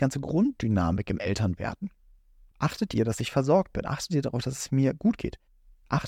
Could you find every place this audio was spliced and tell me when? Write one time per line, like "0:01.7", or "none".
0:02.5